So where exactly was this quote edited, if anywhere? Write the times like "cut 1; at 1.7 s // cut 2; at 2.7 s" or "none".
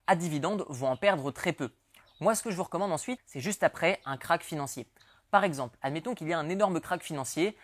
cut 1; at 2.0 s // cut 2; at 3.2 s